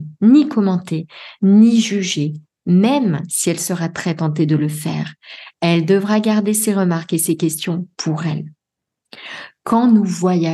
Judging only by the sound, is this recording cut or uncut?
uncut